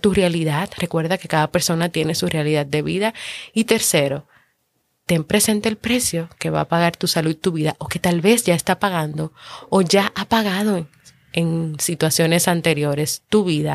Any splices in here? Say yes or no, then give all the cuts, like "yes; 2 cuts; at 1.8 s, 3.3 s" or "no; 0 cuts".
no; 0 cuts